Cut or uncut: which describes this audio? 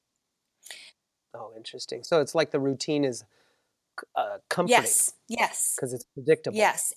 uncut